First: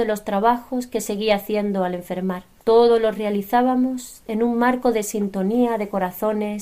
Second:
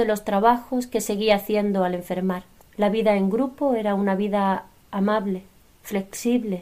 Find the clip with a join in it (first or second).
second